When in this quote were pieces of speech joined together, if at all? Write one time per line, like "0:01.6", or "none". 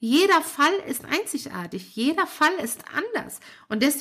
none